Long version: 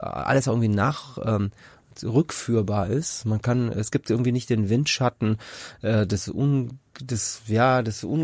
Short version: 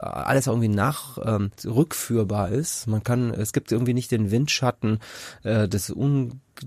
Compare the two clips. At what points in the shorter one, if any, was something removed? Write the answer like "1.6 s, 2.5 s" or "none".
1.5 s